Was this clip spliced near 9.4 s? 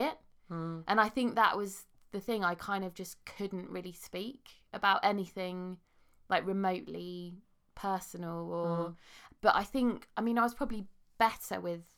no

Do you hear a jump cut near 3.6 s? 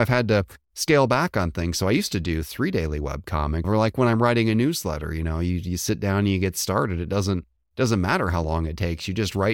yes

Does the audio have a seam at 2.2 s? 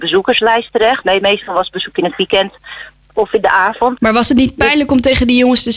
no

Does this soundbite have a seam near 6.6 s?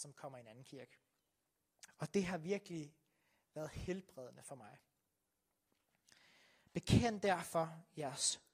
no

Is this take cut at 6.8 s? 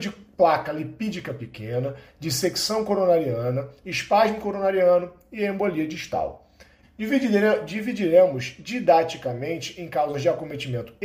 yes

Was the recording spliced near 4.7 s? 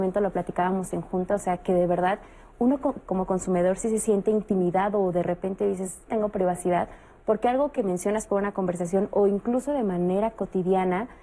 no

